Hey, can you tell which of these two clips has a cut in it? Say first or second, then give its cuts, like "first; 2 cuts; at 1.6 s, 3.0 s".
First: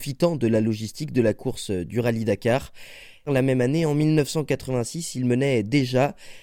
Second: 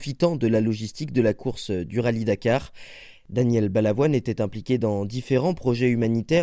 first; 1 cut; at 3.3 s